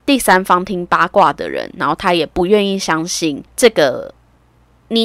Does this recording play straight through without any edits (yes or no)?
no